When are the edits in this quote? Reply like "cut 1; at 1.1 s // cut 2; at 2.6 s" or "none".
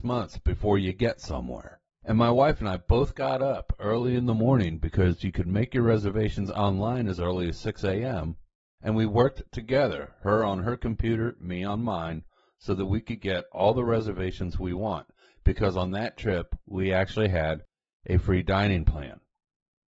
none